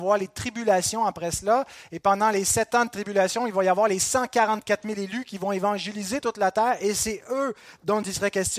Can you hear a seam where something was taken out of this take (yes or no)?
no